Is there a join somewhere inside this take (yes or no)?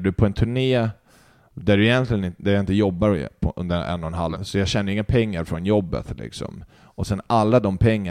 yes